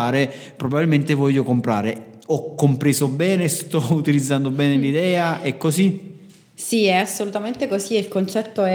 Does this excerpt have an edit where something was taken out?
no; 0 cuts

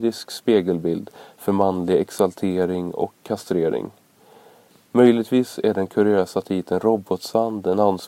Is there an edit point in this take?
no; 0 cuts

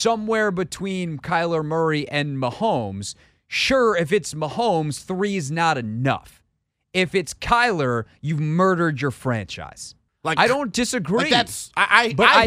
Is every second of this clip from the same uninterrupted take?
no; 1 cut; at 10.1 s

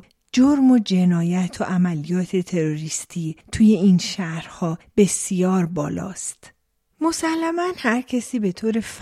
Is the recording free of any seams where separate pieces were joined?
no; 1 cut; at 6.9 s

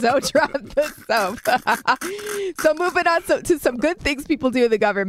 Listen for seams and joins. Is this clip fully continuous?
yes; 0 cuts

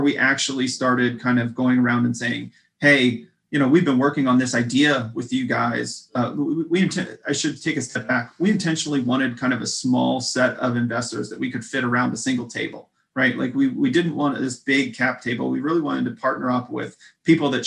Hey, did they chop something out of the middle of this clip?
no; 0 cuts

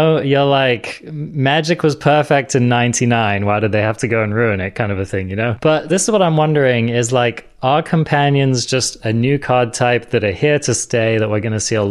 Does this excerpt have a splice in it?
yes; 1 cut; at 5.9 s

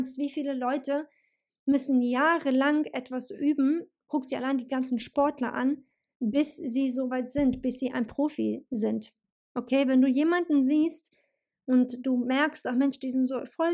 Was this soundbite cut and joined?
yes; 1 cut; at 9.5 s

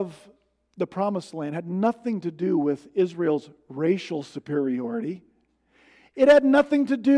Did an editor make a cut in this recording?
no; 0 cuts

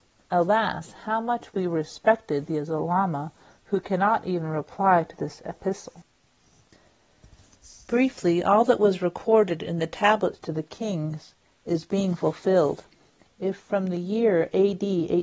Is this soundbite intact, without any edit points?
yes; 0 cuts

